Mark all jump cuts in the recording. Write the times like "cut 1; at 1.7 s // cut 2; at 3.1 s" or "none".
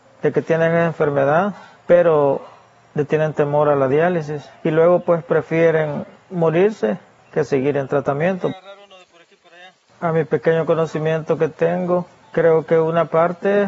none